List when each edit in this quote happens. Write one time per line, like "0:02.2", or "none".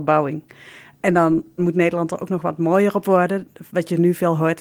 0:01.6

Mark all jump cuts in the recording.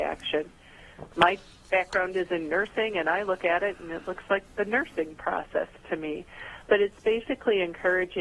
0:01.1

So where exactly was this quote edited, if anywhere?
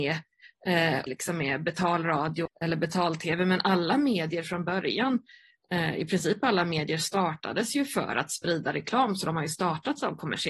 0:01.1
0:02.5

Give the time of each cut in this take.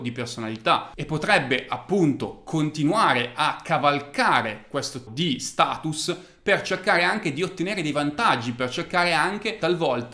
0:05.1

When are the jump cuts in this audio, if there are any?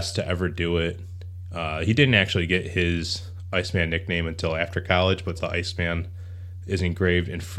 0:05.4

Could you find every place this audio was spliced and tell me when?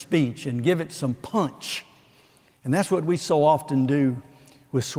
none

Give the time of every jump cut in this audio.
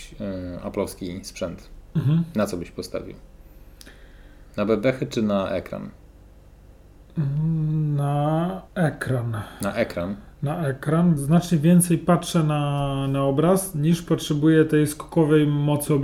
0:08.7
0:11.2

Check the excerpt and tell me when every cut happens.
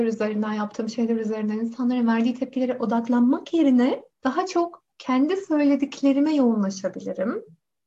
0:04.1

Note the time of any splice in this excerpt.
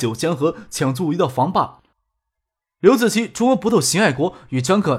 0:01.9

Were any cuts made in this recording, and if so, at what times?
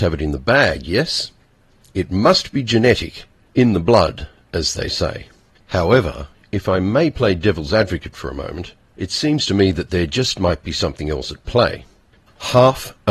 0:12.2

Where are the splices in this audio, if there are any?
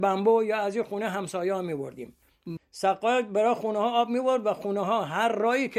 0:02.6

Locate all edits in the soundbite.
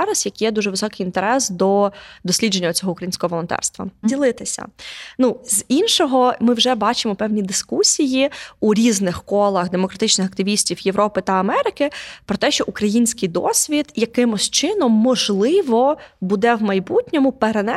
0:04.0

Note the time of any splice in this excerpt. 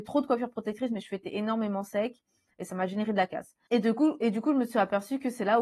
0:03.7

